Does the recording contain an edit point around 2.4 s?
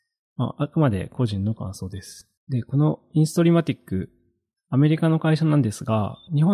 yes; 1 cut; at 2.4 s

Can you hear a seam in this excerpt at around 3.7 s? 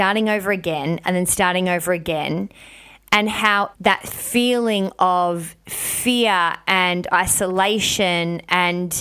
yes; 1 cut; at 3.7 s

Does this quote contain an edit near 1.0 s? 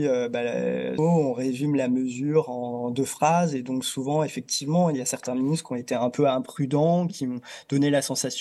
yes; 1 cut; at 1.0 s

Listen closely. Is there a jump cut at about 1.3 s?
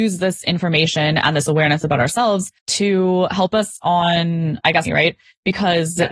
no; 2 cuts; at 2.6 s, 4.8 s

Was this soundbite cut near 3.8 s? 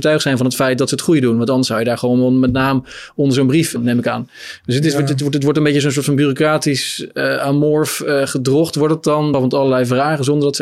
yes; 2 cuts; at 3.8 s, 9.3 s

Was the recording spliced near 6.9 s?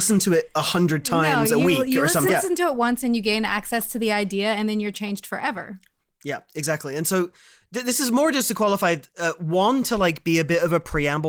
no; 1 cut; at 2.3 s

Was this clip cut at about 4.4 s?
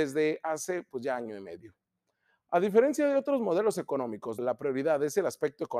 yes; 1 cut; at 4.4 s

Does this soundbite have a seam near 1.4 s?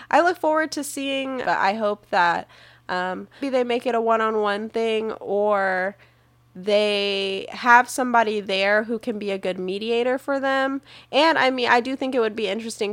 yes; 2 cuts; at 1.4 s, 3.4 s

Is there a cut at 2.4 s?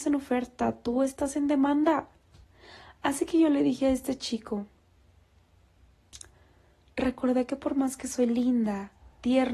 no; 0 cuts

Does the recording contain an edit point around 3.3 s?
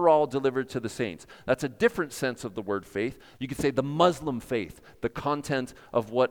yes; 1 cut; at 3.3 s

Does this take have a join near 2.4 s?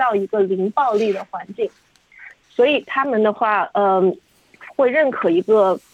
yes; 1 cut; at 2.4 s

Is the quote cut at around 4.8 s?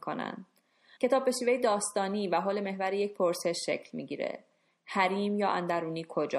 no; 1 cut; at 1.0 s

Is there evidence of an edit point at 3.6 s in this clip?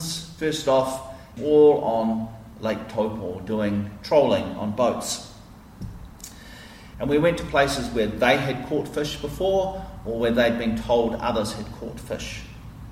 no; 2 cuts; at 1.4 s, 6.9 s

